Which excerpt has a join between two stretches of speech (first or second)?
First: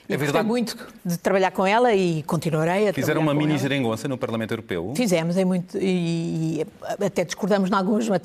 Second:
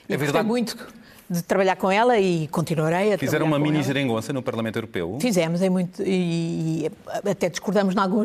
first